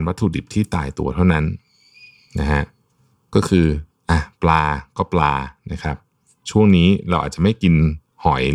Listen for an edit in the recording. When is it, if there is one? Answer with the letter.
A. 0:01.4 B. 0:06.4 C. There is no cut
C